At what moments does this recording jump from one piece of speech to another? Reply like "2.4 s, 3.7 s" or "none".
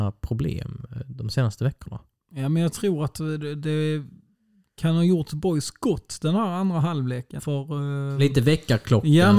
7.4 s